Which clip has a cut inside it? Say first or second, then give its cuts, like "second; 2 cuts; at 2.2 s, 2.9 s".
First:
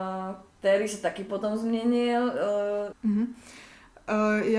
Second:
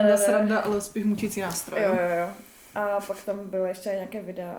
first; 1 cut; at 2.9 s